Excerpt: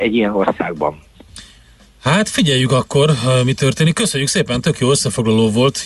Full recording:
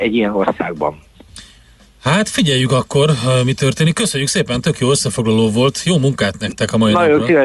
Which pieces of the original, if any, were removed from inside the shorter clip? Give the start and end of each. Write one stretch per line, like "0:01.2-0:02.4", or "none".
none